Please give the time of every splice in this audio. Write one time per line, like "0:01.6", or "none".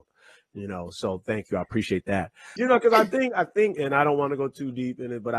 0:02.6
0:03.7